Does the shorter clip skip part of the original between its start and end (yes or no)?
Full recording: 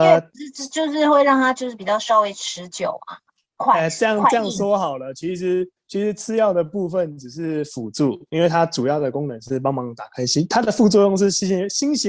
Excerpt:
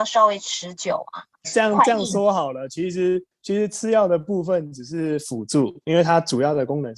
yes